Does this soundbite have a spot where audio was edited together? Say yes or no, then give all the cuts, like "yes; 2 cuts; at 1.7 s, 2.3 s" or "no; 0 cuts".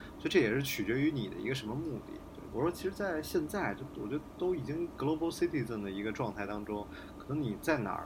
yes; 1 cut; at 2.5 s